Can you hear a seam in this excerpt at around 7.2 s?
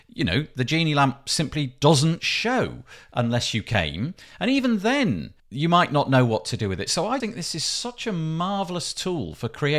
yes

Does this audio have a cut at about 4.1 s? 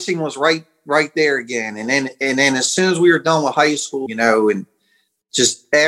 yes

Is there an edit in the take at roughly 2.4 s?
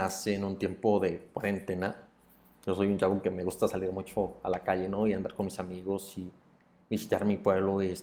no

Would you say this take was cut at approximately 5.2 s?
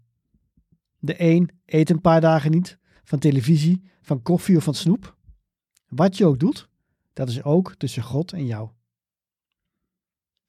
no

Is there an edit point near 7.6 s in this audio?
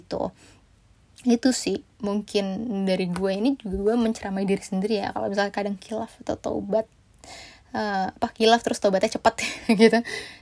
no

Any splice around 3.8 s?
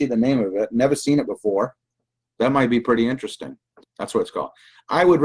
yes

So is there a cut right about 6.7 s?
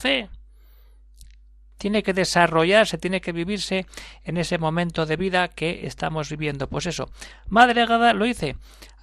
no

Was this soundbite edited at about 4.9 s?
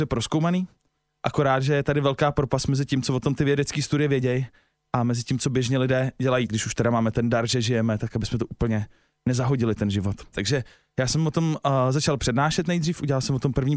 no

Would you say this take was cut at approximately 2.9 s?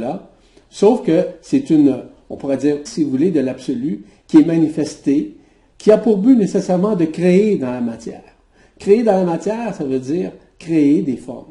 yes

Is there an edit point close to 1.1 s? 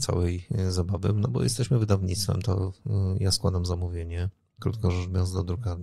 no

